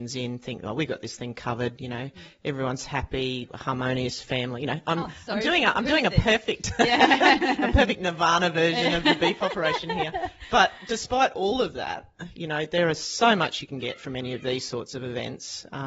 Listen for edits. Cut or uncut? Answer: uncut